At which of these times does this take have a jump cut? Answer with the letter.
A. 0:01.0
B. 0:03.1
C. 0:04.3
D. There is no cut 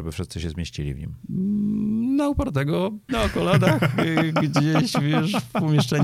B